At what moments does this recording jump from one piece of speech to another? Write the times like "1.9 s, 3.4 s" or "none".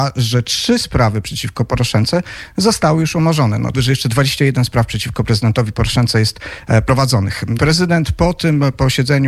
3.7 s, 7.6 s